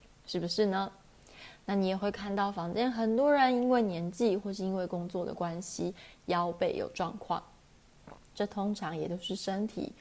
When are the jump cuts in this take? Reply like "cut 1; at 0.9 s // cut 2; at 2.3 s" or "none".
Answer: none